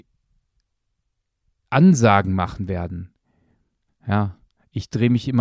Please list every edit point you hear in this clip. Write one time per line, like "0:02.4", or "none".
0:03.9

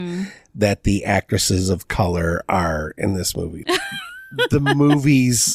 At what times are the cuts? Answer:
0:03.6

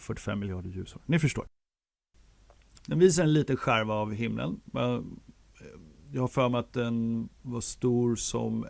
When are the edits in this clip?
0:02.8
0:07.4

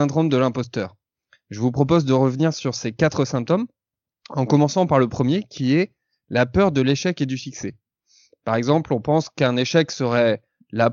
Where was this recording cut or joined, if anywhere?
none

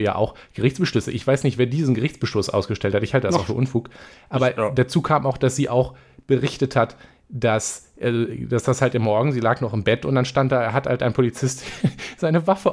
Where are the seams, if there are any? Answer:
none

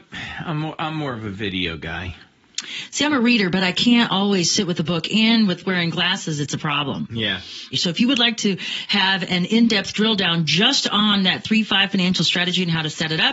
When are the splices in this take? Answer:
0:07.7

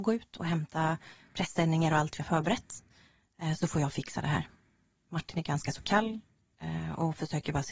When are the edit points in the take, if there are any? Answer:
none

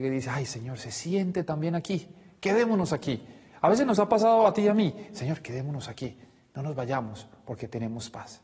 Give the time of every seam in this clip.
none

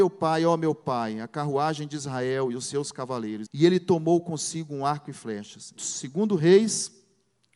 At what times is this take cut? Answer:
0:03.5
0:05.8

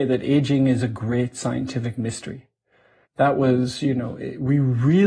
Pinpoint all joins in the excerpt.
0:03.0

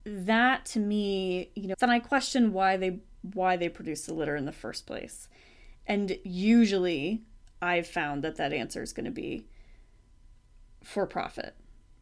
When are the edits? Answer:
0:01.7

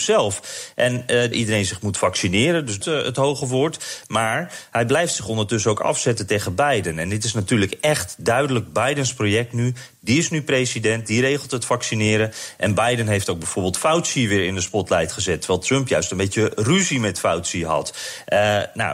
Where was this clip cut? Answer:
0:01.3
0:02.8

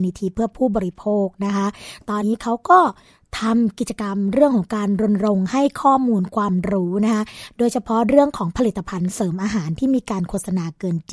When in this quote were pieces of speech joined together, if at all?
0:02.2

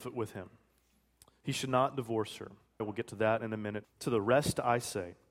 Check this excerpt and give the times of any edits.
0:02.8
0:03.8

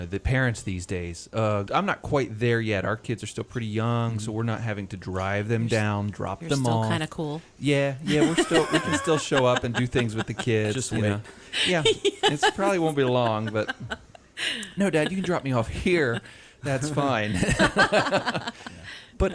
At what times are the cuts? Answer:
0:01.7

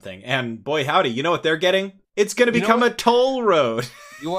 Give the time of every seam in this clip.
0:02.0

